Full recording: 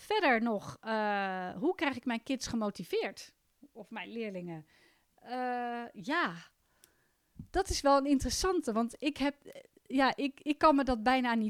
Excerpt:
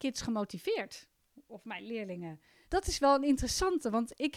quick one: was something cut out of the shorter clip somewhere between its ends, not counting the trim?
yes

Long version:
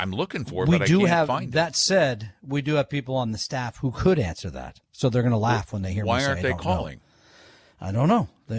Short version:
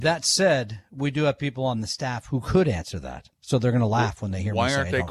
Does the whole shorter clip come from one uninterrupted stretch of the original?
yes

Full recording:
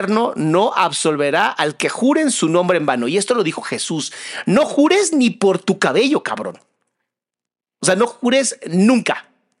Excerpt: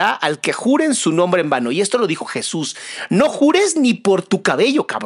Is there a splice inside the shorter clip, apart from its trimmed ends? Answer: no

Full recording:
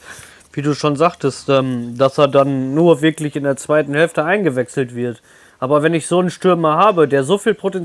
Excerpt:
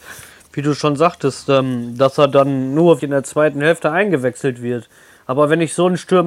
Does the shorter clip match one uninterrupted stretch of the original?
no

